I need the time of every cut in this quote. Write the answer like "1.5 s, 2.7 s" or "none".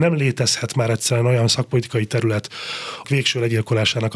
3.0 s